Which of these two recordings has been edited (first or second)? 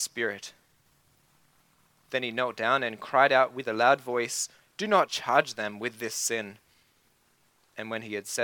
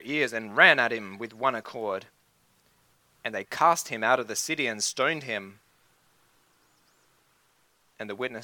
first